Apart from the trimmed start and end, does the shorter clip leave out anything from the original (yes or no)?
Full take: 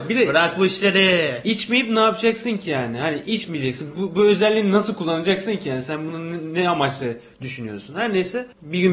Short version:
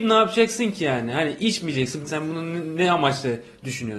yes